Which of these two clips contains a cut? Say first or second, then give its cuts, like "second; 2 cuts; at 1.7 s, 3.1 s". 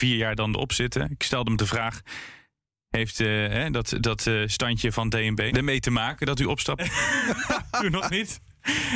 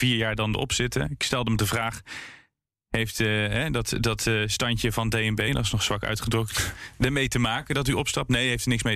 first; 2 cuts; at 5.5 s, 6.8 s